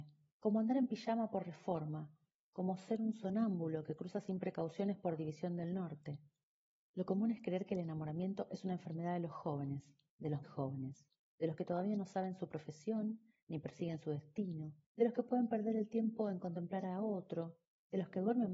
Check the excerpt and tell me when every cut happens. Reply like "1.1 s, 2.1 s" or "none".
10.4 s, 14.8 s